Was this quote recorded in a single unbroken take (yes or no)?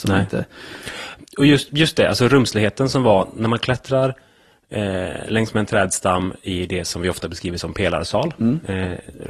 yes